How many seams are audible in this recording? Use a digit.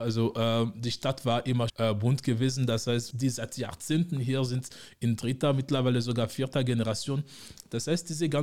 2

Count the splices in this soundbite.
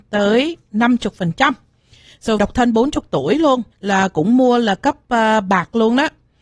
2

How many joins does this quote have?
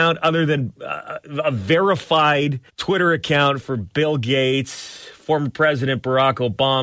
1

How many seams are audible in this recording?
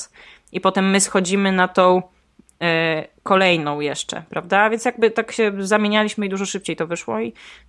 0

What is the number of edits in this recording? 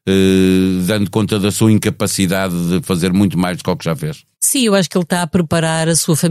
1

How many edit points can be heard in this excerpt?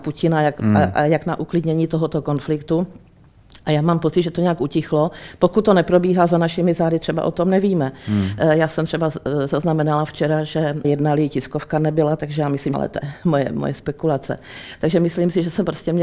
2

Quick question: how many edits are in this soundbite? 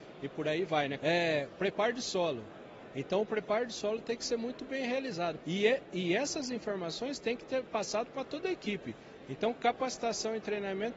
2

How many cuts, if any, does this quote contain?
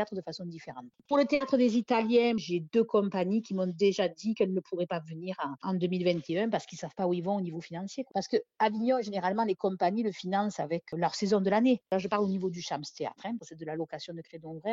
3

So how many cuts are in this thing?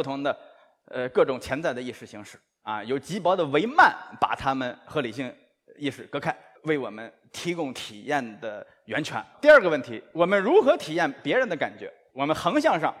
1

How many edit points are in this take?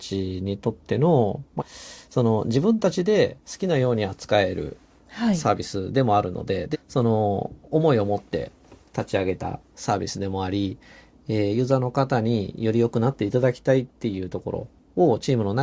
2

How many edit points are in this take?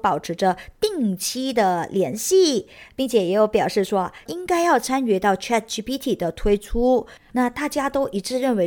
2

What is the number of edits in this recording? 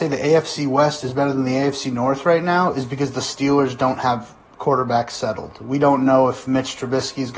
0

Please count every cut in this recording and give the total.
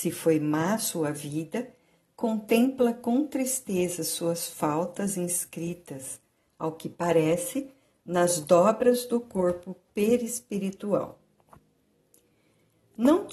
0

